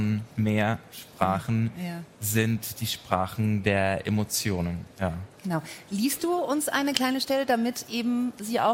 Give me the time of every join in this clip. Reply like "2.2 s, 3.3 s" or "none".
none